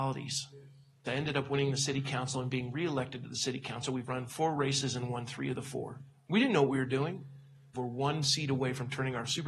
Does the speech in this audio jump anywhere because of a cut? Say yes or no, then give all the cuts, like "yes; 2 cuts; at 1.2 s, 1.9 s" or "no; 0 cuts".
yes; 3 cuts; at 1.1 s, 6.3 s, 7.7 s